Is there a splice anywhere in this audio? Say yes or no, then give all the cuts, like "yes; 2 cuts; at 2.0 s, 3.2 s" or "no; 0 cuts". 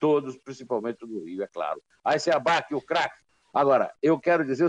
yes; 1 cut; at 3.4 s